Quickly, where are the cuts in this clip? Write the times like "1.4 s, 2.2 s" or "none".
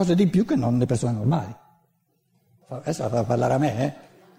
2.6 s